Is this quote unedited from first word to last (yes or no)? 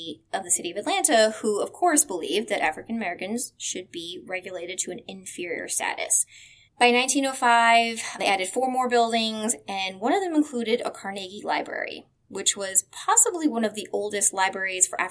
no